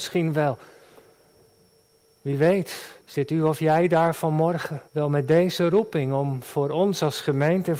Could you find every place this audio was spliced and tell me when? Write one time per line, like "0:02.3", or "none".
0:03.0
0:04.9